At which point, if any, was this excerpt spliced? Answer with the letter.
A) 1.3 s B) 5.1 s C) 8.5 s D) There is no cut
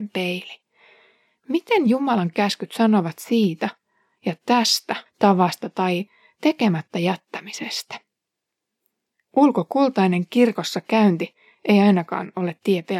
B